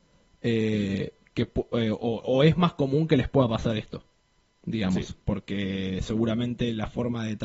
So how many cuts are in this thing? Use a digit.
0